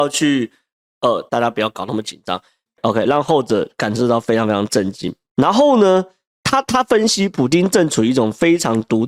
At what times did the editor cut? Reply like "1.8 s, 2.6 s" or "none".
1.3 s, 2.7 s